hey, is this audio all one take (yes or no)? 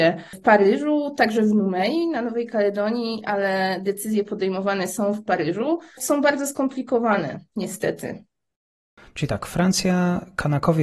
yes